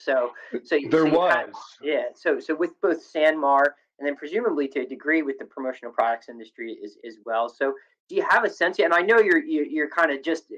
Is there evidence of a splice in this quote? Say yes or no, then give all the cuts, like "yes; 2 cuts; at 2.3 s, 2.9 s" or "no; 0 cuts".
no; 0 cuts